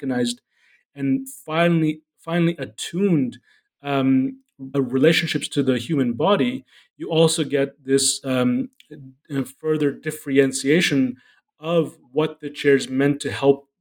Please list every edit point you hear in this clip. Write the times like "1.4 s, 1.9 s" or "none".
4.7 s

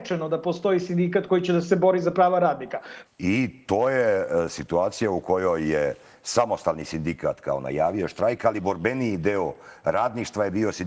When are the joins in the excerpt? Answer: 3.1 s

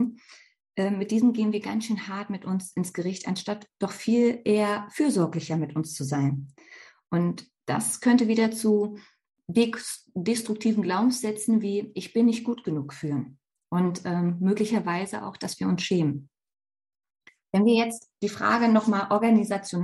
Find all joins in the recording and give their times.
none

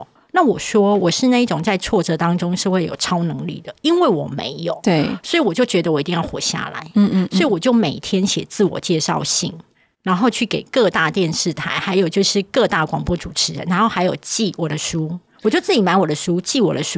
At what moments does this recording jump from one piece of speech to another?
none

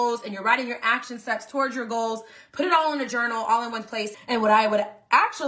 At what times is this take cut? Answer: 4.1 s

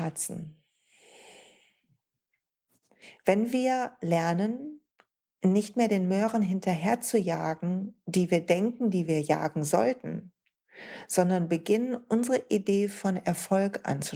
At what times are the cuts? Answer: none

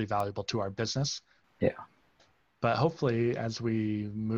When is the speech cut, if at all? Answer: 1.4 s

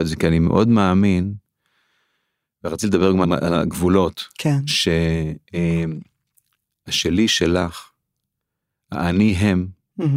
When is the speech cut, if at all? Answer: 3.2 s

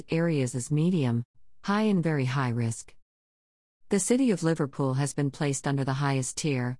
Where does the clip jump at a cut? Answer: none

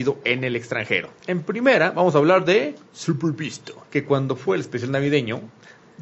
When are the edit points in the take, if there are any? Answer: 1.2 s, 3.8 s

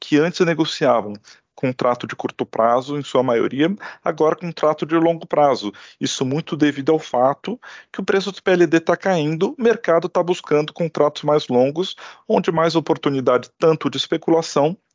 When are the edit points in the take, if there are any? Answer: none

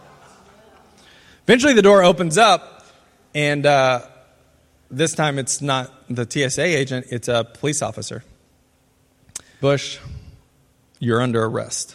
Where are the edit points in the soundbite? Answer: 9.6 s

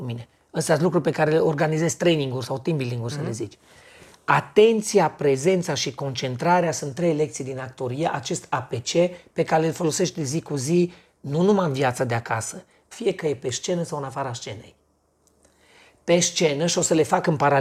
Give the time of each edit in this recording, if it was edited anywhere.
12.9 s

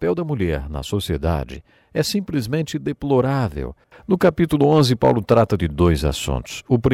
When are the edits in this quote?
3.9 s

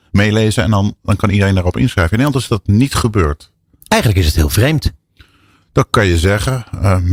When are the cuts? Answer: none

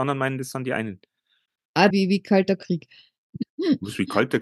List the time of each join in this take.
1.9 s

